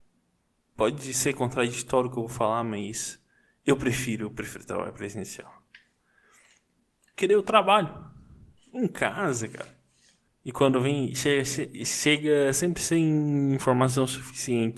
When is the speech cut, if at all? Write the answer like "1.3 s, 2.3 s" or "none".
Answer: 10.3 s